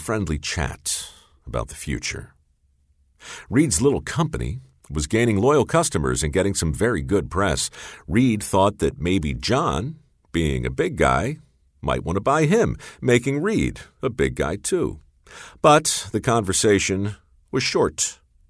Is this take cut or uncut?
uncut